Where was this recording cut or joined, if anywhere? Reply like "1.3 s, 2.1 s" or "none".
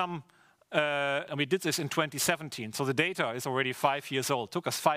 1.3 s